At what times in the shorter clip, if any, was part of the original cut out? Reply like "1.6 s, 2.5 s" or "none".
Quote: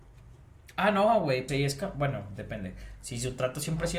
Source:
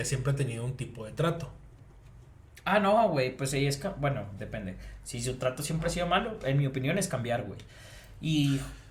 1.5 s